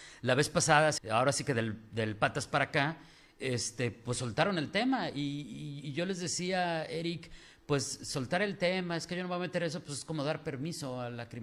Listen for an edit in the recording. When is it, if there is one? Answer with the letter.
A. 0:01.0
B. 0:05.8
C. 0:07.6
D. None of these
A